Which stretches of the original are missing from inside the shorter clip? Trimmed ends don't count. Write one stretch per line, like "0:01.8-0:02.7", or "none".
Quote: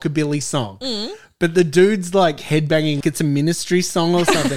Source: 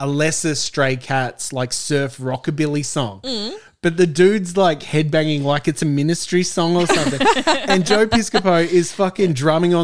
0:05.4-0:05.6